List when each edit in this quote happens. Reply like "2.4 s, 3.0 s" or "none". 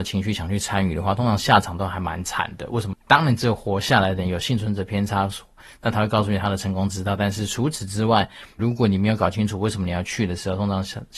2.9 s, 8.6 s